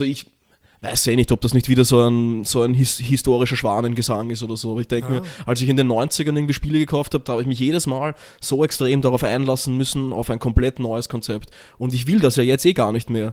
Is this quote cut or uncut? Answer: uncut